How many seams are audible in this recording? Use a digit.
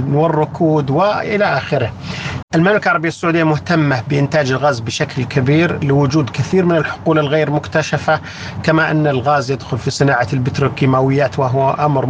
1